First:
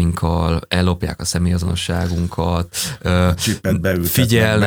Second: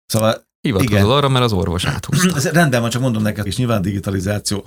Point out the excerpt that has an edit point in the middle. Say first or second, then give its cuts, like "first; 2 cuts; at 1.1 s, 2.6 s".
second; 1 cut; at 3.5 s